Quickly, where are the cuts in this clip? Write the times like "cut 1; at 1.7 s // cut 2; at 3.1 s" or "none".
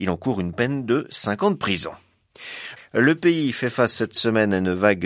cut 1; at 2.8 s

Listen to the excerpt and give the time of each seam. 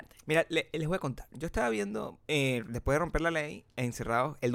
cut 1; at 2.3 s

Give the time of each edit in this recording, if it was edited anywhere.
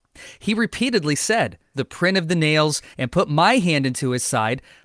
cut 1; at 1.7 s // cut 2; at 2.9 s

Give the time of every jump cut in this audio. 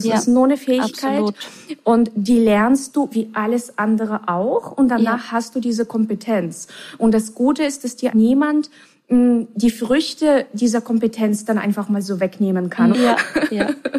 cut 1; at 8.1 s // cut 2; at 12.9 s

